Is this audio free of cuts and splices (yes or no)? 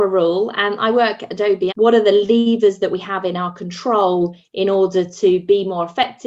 no